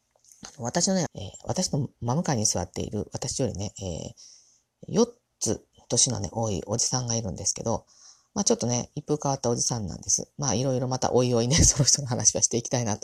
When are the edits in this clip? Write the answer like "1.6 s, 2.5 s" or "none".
1.1 s